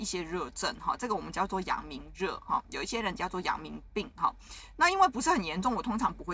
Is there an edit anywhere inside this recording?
no; 0 cuts

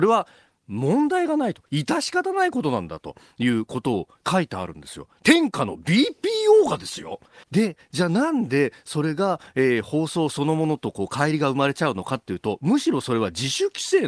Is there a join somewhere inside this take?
yes; 1 cut; at 7.4 s

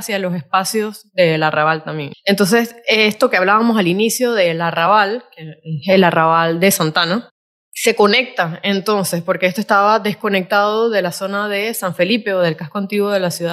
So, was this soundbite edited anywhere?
yes; 1 cut; at 2.1 s

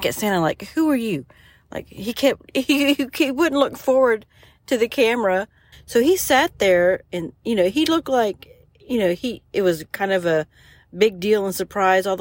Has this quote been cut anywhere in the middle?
yes; 1 cut; at 5.7 s

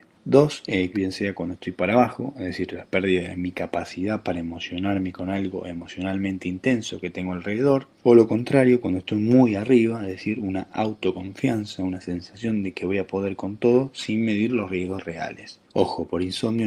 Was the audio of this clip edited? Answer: yes; 2 cuts; at 0.9 s, 15.6 s

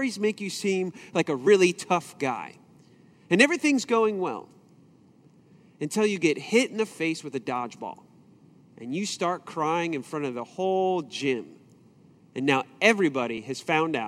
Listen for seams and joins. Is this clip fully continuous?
yes; 0 cuts

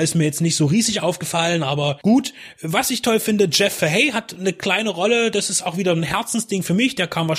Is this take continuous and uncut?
yes; 0 cuts

